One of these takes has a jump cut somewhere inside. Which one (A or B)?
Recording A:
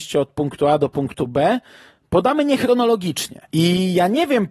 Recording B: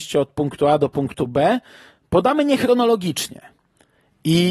A